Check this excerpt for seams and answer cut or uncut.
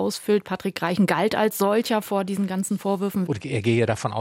cut